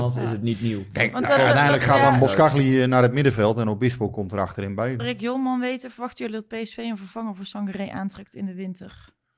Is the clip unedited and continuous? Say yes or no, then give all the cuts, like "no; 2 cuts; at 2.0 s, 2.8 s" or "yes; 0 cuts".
no; 1 cut; at 5.0 s